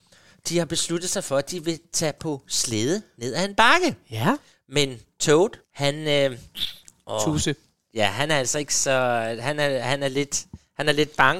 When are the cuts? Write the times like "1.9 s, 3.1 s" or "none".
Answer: 5.6 s